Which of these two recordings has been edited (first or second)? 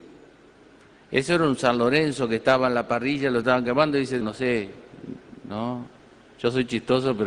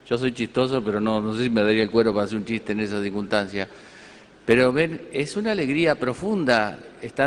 first